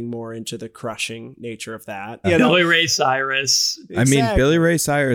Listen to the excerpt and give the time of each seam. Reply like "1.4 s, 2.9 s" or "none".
2.2 s